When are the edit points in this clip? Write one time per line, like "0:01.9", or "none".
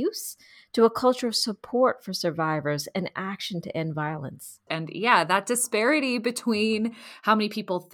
0:04.7